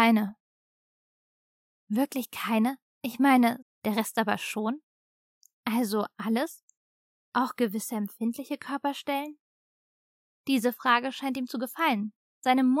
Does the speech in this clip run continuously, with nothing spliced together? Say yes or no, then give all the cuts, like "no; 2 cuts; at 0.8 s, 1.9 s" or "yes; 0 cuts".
no; 2 cuts; at 3.6 s, 10.4 s